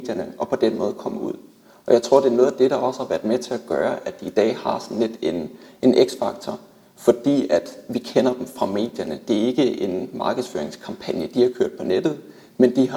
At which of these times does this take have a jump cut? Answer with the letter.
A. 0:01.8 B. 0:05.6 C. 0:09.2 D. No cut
D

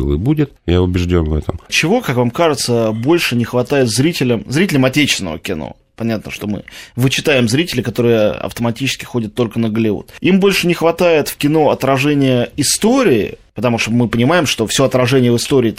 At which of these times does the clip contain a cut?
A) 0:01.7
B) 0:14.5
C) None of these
A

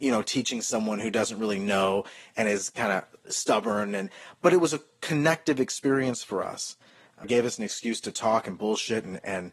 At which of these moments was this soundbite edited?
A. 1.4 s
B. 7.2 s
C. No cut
B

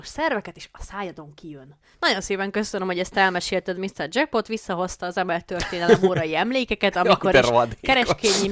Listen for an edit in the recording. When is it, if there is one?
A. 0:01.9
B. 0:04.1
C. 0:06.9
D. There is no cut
A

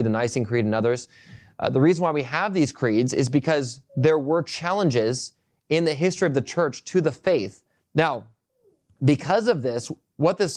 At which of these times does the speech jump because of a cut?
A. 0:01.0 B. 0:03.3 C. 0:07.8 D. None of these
C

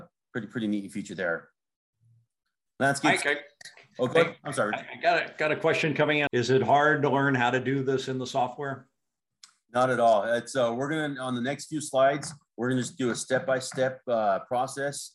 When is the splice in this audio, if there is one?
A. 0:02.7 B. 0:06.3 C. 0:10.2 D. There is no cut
B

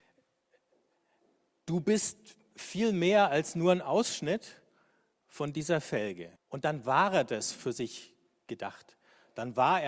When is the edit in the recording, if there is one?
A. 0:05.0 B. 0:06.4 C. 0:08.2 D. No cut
B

